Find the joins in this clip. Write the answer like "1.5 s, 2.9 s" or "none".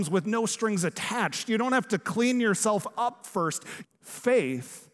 3.8 s